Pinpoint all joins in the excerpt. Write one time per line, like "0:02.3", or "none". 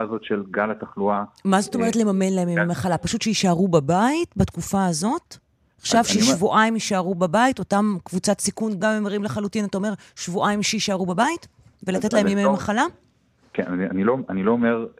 0:08.8